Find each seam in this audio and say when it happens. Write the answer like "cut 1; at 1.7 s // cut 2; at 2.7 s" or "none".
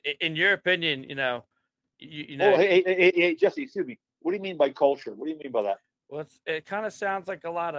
cut 1; at 6.0 s